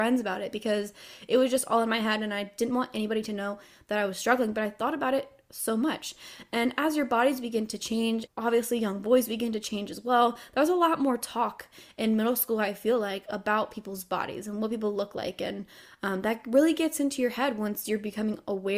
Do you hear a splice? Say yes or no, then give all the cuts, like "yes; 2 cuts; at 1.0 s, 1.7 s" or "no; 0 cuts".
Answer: yes; 1 cut; at 8.3 s